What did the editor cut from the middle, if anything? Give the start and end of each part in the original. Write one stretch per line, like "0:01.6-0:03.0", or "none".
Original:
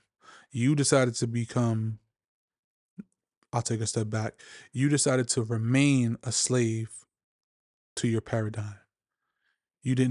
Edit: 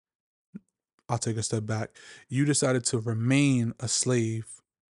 none